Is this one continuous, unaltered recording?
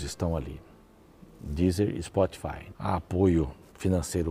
no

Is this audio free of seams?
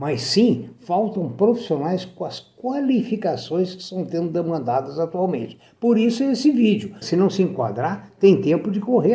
no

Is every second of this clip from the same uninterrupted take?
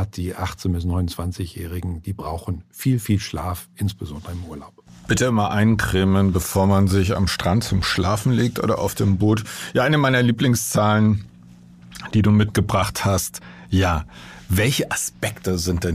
yes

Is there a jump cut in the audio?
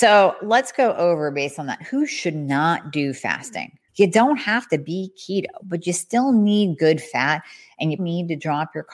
yes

